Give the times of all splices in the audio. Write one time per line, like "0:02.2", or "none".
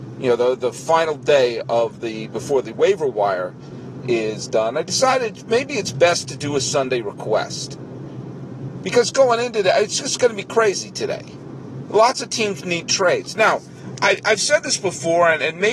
none